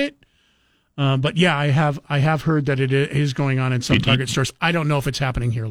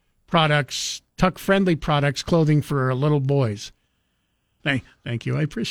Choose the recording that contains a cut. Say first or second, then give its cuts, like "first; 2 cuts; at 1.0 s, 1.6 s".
second; 1 cut; at 4.6 s